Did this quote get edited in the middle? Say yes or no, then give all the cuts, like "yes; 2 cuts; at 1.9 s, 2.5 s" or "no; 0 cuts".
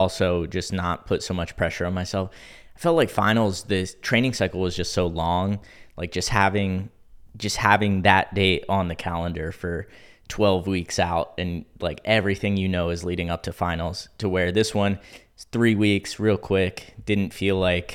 no; 0 cuts